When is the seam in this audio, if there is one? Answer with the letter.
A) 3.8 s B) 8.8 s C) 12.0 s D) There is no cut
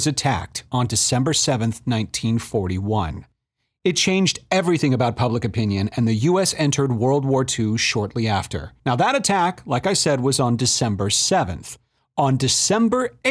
B